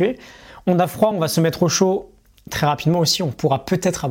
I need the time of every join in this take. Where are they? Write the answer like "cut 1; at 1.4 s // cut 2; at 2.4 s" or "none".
none